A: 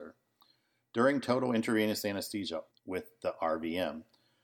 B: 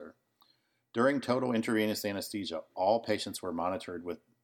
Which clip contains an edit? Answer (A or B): A